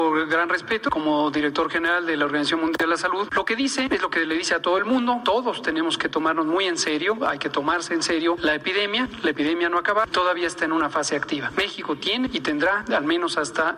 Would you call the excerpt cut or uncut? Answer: uncut